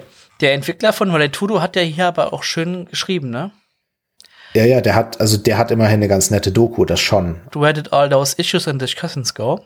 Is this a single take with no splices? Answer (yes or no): no